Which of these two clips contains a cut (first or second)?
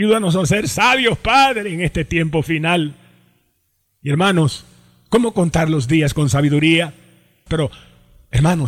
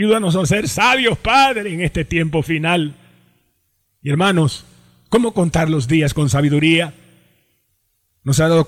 first